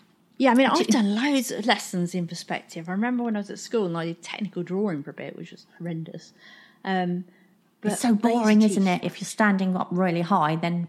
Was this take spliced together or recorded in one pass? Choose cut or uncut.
cut